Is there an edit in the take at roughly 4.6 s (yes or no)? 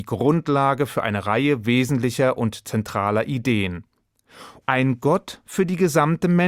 yes